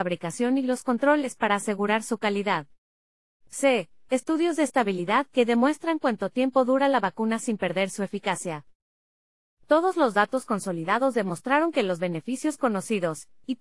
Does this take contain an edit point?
no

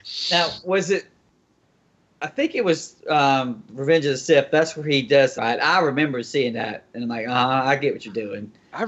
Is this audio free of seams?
no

